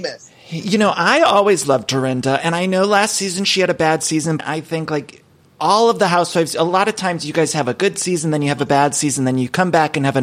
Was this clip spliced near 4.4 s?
yes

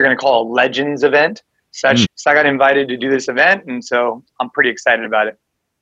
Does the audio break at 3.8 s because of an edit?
no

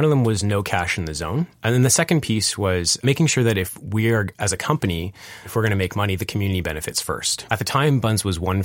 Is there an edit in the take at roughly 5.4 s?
no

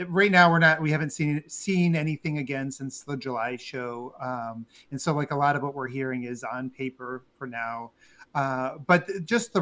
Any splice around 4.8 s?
no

